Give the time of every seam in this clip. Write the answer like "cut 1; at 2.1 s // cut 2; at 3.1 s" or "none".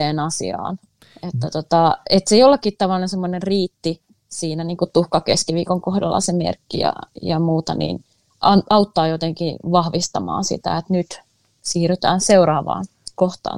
none